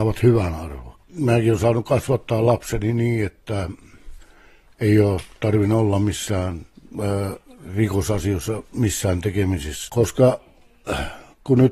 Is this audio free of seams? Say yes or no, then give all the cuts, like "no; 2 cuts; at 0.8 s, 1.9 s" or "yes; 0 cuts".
no; 2 cuts; at 1.0 s, 9.9 s